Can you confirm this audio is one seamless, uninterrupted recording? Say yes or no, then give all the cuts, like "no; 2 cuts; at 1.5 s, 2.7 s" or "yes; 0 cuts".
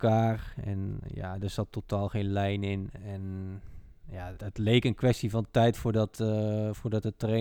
no; 2 cuts; at 3.0 s, 4.4 s